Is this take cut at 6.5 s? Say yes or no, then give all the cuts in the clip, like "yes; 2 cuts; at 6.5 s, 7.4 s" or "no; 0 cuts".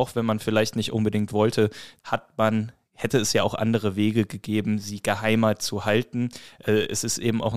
no; 1 cut; at 2.0 s